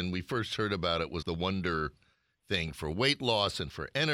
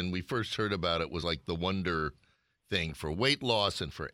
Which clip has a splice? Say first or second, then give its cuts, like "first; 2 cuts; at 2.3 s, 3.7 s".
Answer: first; 1 cut; at 1.2 s